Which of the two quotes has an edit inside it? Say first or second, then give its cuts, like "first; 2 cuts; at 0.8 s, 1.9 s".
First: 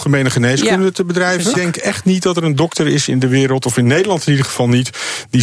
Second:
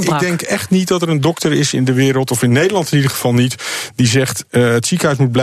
first; 1 cut; at 1.5 s